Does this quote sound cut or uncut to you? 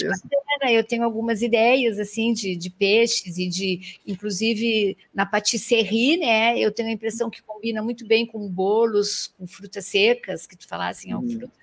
uncut